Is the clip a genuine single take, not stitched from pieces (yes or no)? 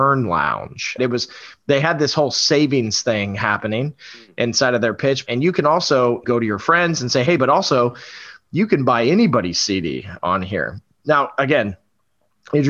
no